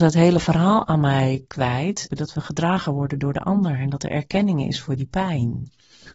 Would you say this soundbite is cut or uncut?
cut